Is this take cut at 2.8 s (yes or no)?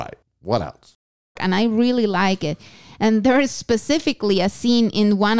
no